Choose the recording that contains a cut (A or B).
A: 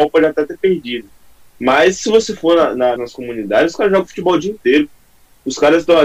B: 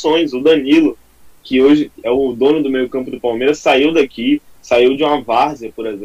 A